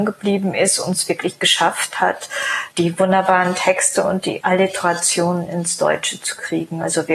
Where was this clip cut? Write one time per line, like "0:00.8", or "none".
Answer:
0:02.7